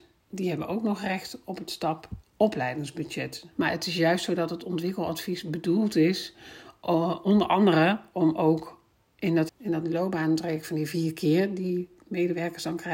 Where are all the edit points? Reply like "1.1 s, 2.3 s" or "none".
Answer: 3.5 s, 9.5 s

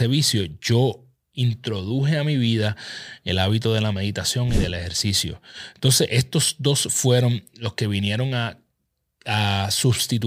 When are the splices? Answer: none

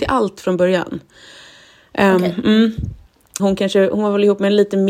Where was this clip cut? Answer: 3.4 s

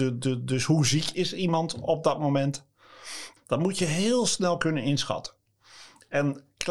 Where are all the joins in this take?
3.4 s

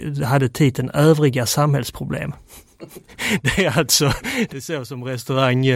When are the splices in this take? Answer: 4.5 s

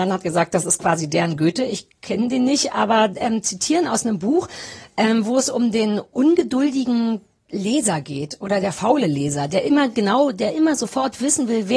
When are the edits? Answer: none

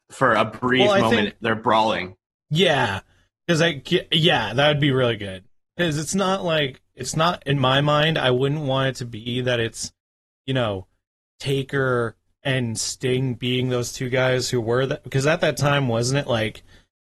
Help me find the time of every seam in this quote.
none

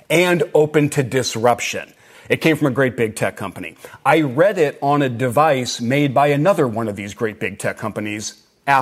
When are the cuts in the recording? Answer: 2.1 s

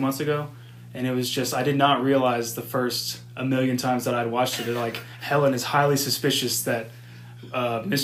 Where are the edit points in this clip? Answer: none

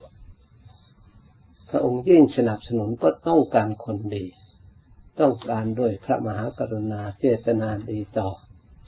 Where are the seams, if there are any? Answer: none

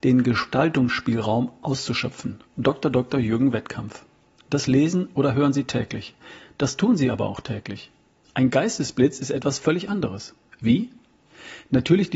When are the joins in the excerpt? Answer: 4.4 s, 10.6 s

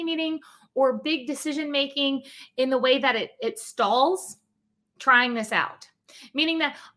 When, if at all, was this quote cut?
none

